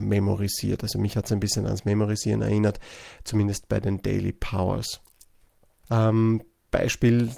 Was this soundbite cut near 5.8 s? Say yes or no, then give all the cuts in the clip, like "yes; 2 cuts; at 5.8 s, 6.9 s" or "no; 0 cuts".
yes; 1 cut; at 5.8 s